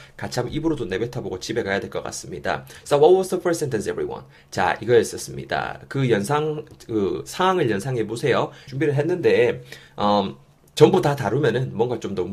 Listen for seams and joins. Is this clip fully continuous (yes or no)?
no